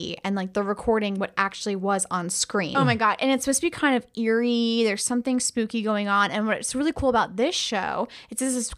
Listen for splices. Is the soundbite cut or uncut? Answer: cut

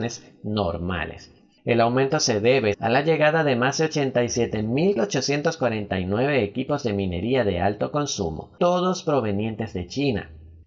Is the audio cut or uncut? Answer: cut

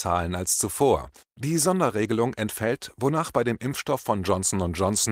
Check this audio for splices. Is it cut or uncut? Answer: cut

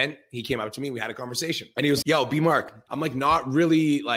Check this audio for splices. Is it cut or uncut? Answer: cut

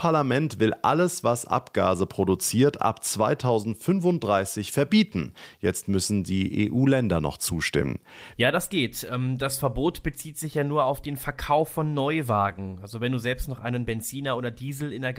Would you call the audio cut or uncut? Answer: cut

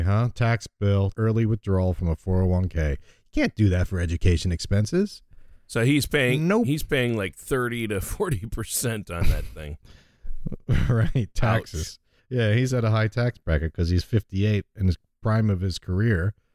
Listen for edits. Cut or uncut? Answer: cut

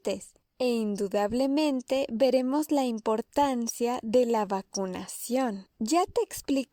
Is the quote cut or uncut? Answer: cut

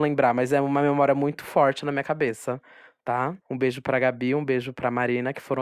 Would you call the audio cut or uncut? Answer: cut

